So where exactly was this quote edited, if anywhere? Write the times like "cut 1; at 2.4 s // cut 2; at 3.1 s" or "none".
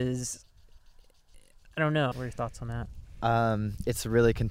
cut 1; at 2.1 s